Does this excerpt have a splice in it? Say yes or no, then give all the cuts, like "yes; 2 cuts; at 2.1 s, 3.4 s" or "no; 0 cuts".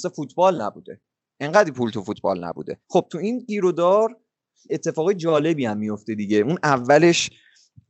yes; 1 cut; at 2.8 s